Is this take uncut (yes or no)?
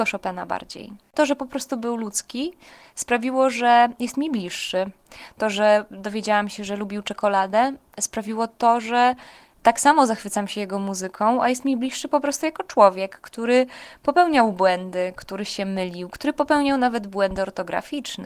yes